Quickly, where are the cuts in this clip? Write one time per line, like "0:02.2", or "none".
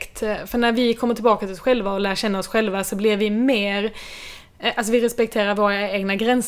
none